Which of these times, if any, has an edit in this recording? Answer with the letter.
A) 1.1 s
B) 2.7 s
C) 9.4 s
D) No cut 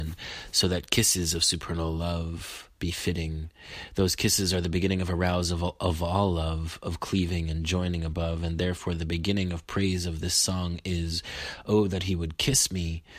B